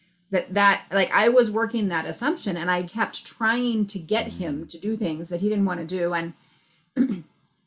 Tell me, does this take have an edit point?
yes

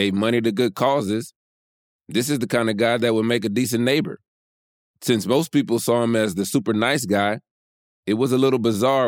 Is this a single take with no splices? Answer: yes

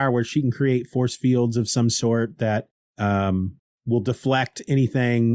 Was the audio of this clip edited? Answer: no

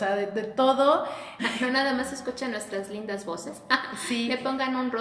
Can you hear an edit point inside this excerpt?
yes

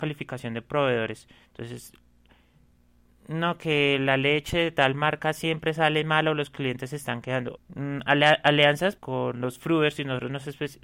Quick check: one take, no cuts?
no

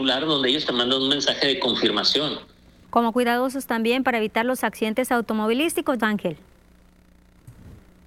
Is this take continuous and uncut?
no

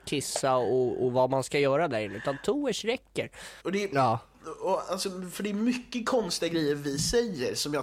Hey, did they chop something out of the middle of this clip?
yes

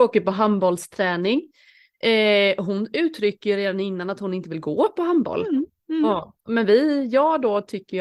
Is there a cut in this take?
no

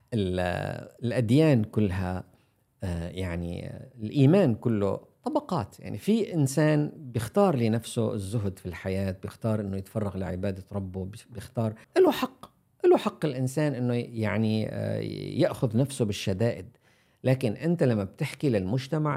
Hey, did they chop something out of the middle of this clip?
yes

